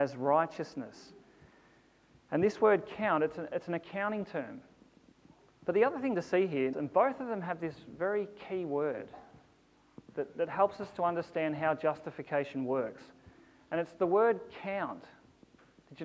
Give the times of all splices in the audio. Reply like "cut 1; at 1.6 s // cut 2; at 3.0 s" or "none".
cut 1; at 5.6 s // cut 2; at 6.7 s